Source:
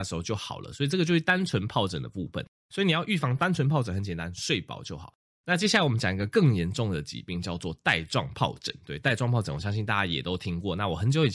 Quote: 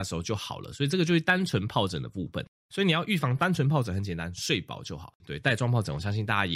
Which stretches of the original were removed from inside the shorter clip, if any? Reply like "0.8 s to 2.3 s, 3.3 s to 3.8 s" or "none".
5.2 s to 8.8 s